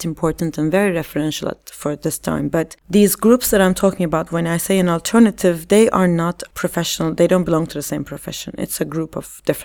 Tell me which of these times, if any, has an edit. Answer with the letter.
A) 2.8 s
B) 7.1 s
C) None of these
A